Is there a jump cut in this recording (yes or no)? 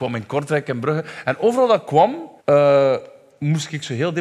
yes